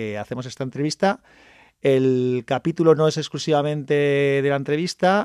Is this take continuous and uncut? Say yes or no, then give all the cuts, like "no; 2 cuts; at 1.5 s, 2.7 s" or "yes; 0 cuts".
yes; 0 cuts